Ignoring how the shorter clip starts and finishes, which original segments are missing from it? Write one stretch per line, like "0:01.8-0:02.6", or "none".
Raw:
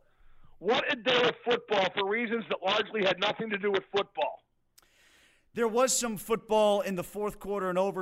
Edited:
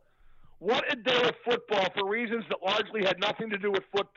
none